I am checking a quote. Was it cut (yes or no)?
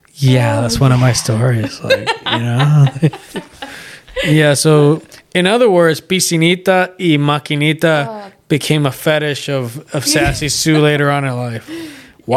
no